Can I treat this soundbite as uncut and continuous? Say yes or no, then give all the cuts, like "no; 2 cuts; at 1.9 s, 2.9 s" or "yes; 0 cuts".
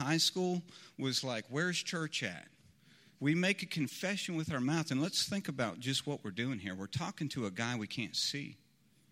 no; 1 cut; at 3.2 s